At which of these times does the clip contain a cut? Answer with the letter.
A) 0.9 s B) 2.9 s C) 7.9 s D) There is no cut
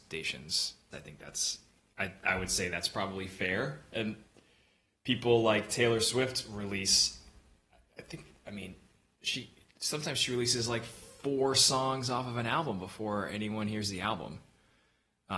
A